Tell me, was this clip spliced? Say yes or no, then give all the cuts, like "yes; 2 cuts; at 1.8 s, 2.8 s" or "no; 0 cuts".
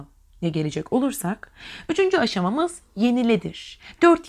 no; 0 cuts